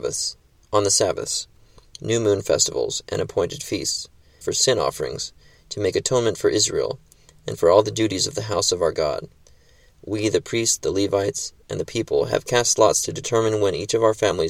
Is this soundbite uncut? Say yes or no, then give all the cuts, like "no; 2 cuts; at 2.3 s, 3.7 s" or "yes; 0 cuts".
no; 1 cut; at 4.4 s